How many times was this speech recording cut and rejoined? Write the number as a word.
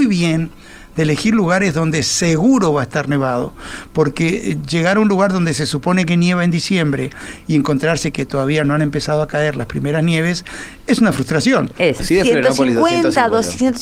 one